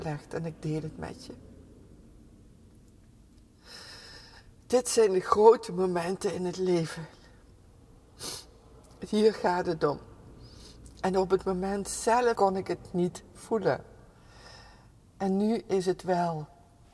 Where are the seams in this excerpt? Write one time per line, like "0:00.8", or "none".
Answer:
0:12.4